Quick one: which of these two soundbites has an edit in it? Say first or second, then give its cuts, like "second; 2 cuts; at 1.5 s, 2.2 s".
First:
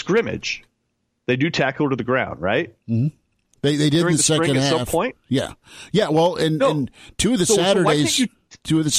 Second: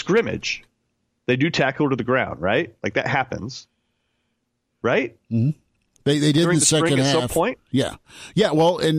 first; 1 cut; at 2.8 s